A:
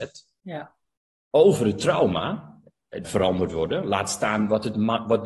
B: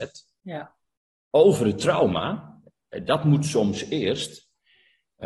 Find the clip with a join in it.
A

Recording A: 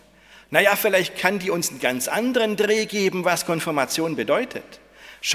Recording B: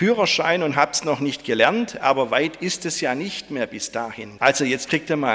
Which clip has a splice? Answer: B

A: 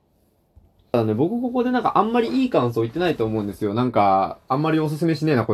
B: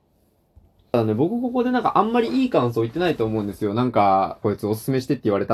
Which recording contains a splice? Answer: B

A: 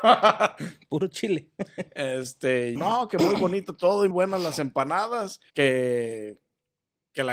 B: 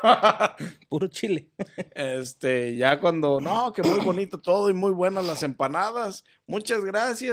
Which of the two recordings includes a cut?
A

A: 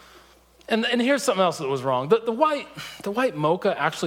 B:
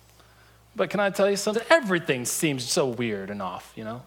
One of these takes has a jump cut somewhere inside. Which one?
B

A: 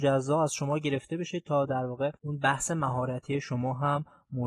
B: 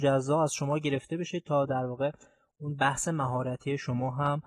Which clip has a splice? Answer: A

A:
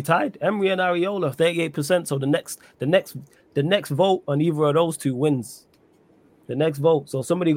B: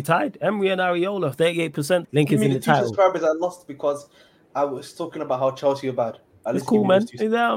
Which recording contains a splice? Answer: B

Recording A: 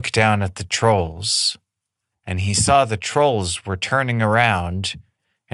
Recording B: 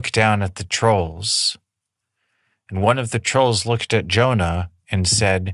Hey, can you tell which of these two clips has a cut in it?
A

